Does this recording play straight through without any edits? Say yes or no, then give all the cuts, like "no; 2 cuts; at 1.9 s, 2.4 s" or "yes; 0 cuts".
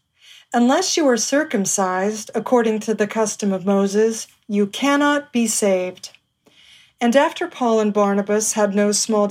yes; 0 cuts